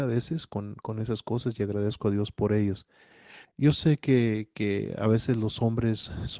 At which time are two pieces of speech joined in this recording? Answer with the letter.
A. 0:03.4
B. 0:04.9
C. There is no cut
A